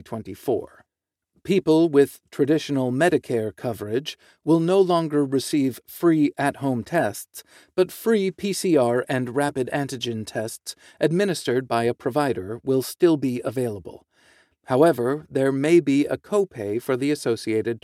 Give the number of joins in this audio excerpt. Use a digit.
0